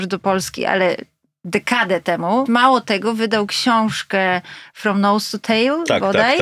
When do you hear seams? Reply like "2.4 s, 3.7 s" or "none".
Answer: 2.5 s